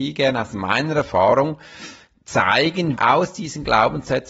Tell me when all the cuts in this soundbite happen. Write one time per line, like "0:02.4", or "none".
0:03.0